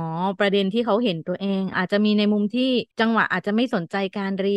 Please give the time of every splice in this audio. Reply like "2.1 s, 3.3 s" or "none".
1.7 s, 2.9 s